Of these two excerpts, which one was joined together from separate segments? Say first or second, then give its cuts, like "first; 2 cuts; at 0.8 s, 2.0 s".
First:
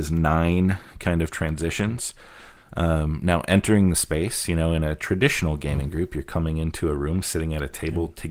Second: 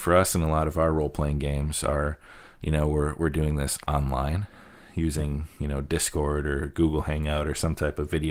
first; 1 cut; at 2.6 s